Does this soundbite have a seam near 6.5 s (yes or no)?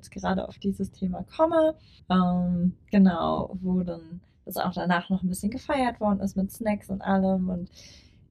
no